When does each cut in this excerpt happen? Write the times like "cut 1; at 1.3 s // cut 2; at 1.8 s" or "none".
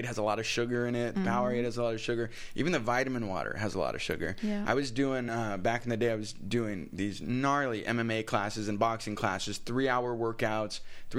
none